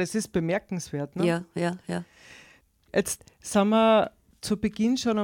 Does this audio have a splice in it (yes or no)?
no